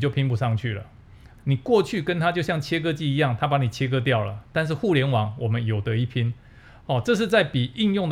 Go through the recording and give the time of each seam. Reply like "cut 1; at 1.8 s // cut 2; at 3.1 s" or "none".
cut 1; at 1.4 s